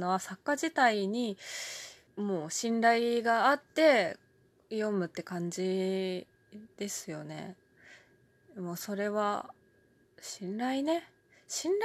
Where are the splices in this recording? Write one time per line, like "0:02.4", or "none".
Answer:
0:02.1
0:10.0